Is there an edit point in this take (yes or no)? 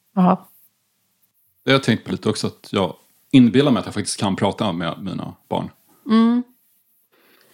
no